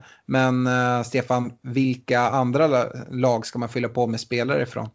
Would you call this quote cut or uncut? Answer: uncut